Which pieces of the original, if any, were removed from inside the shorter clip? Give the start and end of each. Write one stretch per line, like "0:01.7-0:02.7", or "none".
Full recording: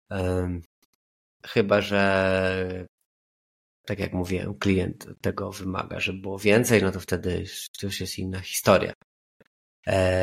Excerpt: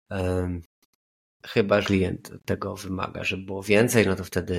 0:01.8-0:04.6